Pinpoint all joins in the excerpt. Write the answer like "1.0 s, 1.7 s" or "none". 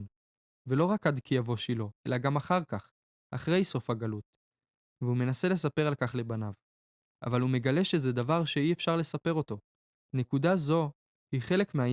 10.0 s